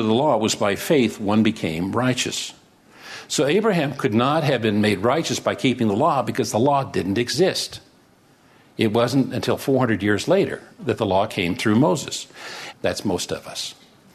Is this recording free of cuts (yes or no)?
no